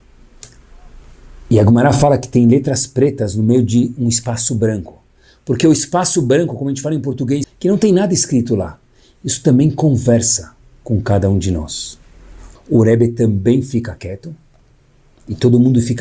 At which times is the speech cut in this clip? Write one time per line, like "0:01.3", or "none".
0:07.4
0:12.6